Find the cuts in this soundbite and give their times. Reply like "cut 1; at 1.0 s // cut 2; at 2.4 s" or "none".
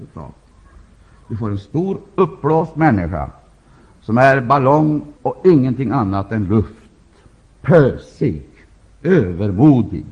cut 1; at 5.2 s // cut 2; at 7.4 s